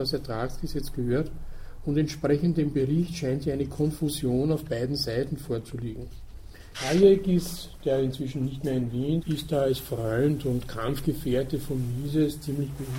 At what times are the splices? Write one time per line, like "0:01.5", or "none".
0:06.7
0:09.2